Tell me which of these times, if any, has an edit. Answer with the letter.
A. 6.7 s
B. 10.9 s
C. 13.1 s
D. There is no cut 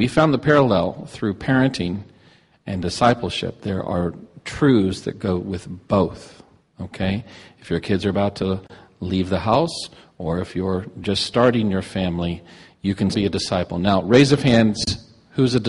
C